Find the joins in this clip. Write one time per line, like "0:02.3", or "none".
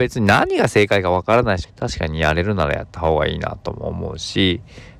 0:01.6